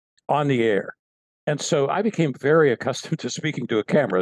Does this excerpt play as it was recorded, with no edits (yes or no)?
yes